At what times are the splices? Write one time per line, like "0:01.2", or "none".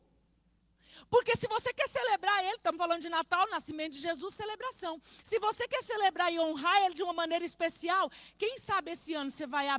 none